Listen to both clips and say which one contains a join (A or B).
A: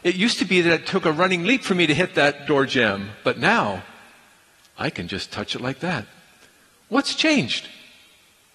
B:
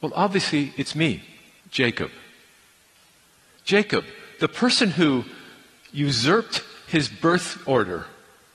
B